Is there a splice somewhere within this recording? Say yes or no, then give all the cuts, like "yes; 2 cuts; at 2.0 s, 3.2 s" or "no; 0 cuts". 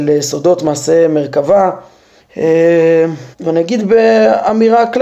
yes; 2 cuts; at 2.2 s, 3.3 s